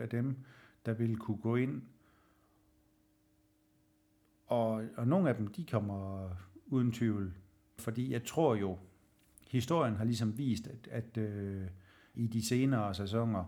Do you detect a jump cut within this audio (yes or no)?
yes